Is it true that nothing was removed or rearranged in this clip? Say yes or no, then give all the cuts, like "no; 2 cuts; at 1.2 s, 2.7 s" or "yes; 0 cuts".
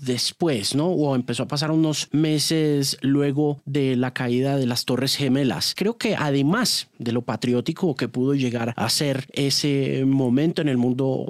no; 1 cut; at 5.8 s